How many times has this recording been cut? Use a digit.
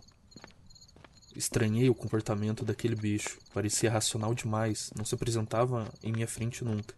0